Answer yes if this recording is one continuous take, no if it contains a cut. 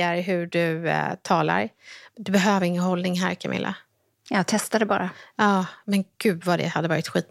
yes